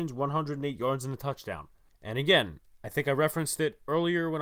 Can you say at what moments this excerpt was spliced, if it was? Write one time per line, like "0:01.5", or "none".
0:01.9